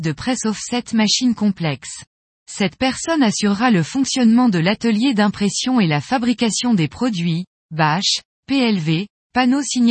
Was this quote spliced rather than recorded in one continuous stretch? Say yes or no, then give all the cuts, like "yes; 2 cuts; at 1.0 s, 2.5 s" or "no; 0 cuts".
yes; 1 cut; at 2.3 s